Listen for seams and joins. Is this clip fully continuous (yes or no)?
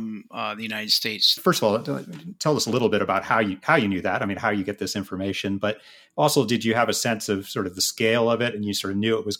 no